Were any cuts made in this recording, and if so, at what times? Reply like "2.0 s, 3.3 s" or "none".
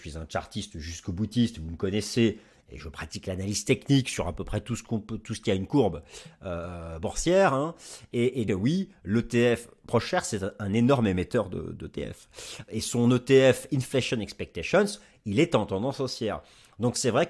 8.5 s, 12.7 s